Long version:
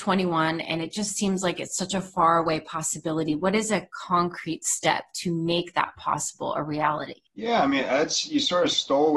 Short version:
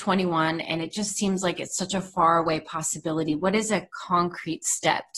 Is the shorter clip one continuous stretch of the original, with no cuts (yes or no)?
yes